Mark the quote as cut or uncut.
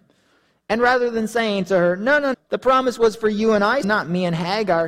cut